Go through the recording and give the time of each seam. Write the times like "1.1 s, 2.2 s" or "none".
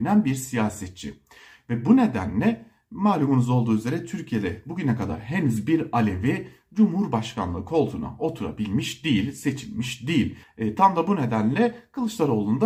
10.4 s